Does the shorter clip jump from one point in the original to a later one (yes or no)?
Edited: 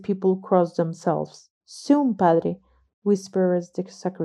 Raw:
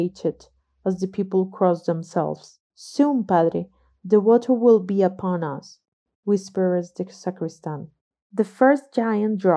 yes